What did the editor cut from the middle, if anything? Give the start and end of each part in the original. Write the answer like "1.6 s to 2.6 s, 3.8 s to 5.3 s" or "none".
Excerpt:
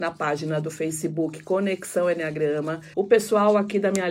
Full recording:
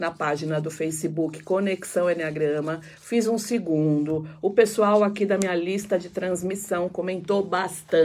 2.9 s to 4.4 s